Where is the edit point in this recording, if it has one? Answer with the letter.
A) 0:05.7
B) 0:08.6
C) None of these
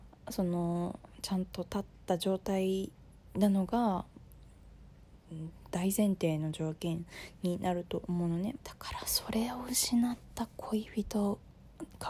B